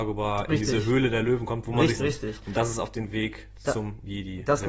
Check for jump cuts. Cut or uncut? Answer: cut